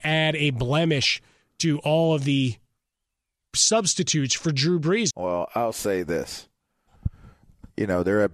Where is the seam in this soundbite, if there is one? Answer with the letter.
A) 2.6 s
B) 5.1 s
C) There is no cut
B